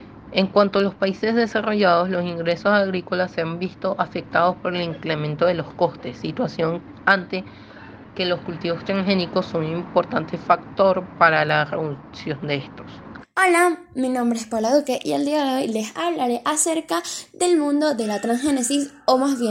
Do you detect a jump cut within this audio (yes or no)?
yes